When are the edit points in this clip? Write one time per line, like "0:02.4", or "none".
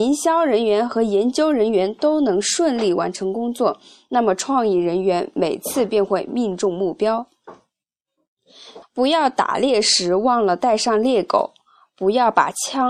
0:08.8

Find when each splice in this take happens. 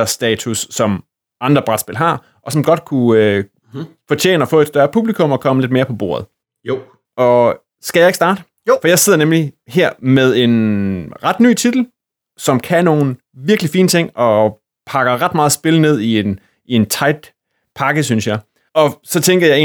0:18.7

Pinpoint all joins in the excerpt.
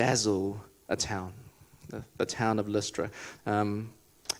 0:03.4

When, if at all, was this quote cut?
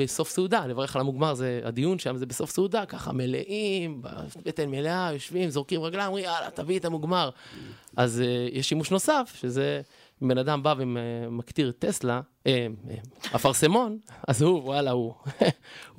none

